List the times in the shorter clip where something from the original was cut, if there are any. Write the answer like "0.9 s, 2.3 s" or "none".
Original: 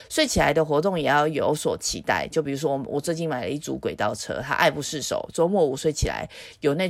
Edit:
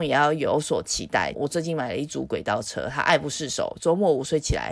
1.3 s